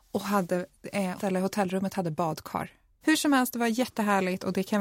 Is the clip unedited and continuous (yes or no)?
no